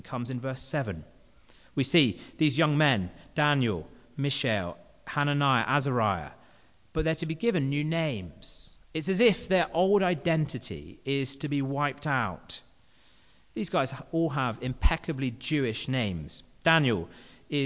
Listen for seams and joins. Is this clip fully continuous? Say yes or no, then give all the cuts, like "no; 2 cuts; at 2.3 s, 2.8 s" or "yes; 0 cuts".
yes; 0 cuts